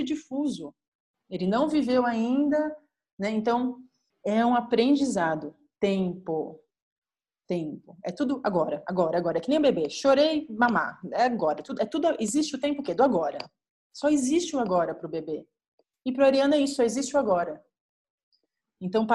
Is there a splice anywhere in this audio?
no; 0 cuts

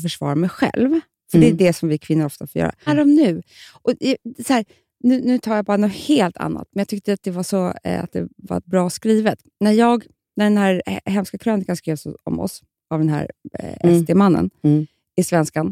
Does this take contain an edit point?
yes; 1 cut; at 2.9 s

